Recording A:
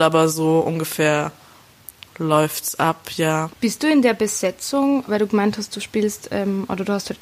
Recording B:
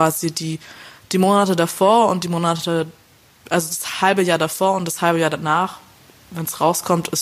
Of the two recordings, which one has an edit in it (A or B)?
A